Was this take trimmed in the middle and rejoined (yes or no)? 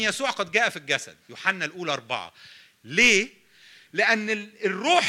yes